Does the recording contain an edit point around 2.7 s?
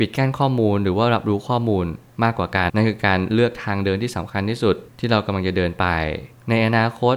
yes; 1 cut; at 2.7 s

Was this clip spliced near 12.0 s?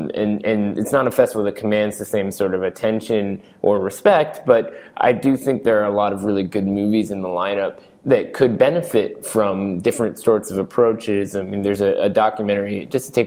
no; 0 cuts

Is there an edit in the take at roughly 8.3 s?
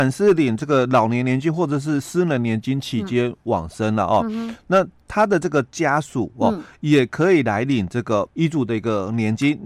yes; 1 cut; at 8.3 s

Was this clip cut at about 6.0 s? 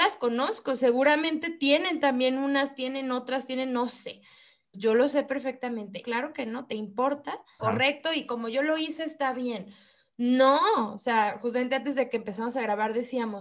yes; 3 cuts; at 4.7 s, 6.0 s, 7.6 s

